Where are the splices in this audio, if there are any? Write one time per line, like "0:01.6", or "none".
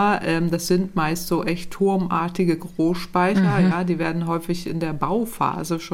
none